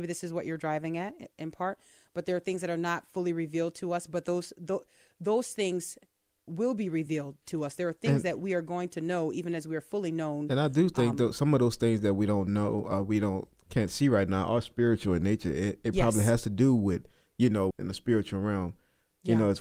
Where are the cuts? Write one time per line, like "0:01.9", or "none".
0:17.7